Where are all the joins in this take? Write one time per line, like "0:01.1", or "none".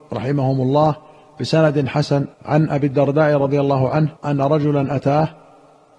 0:02.3
0:04.2